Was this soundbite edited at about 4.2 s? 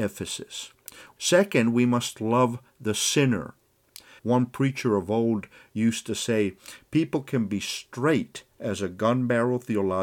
yes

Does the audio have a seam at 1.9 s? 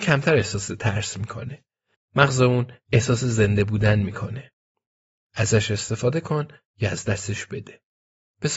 no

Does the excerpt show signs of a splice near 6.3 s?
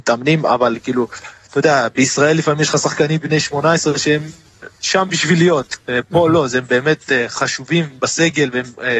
no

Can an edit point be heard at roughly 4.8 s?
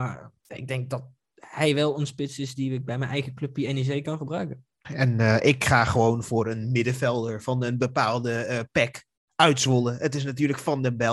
yes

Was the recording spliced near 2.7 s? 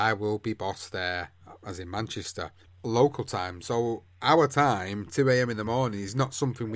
yes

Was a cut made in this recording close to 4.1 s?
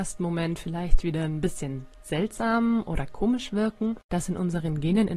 yes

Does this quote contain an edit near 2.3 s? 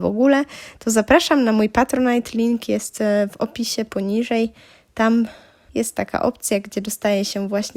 no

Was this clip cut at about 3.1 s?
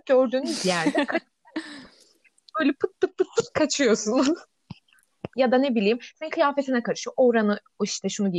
no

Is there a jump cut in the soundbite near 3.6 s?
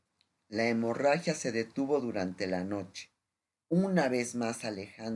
yes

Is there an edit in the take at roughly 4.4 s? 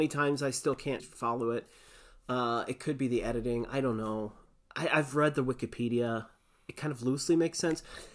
no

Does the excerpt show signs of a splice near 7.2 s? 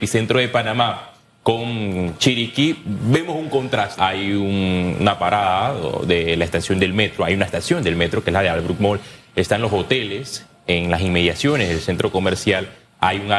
no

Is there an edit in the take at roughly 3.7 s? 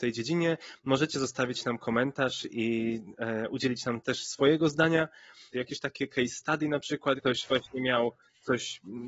no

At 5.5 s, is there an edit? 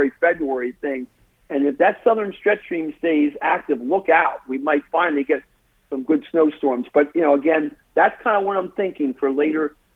no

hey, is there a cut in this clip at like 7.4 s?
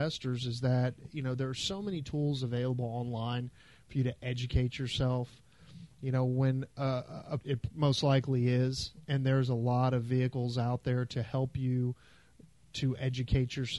yes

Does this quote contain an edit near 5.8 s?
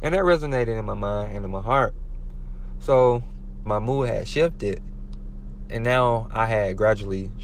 no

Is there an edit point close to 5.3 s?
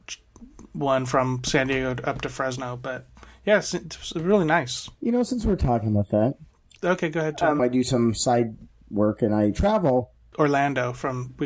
no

